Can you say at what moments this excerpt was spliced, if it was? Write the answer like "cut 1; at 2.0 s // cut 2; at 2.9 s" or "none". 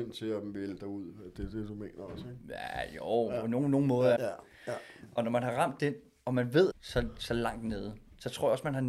cut 1; at 4.2 s // cut 2; at 6.7 s